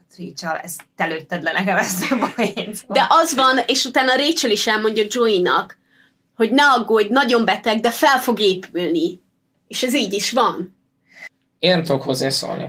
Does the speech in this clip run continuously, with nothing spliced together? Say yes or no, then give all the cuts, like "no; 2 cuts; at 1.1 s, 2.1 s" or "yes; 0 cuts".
yes; 0 cuts